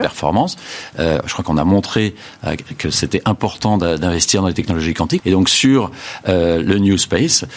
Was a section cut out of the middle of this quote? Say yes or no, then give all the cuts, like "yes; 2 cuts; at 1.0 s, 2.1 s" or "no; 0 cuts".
yes; 1 cut; at 5.2 s